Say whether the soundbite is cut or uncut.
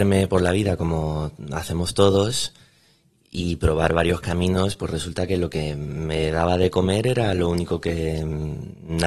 uncut